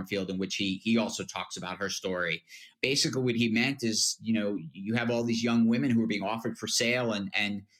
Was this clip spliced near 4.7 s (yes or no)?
no